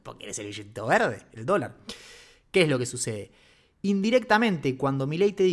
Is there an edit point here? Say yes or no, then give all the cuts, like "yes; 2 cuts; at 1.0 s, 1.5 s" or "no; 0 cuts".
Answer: no; 0 cuts